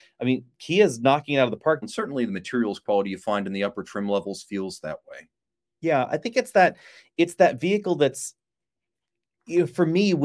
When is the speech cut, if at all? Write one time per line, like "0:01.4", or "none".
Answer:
0:01.8